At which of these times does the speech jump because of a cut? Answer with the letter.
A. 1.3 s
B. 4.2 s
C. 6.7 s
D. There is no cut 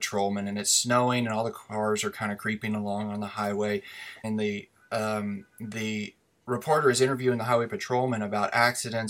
B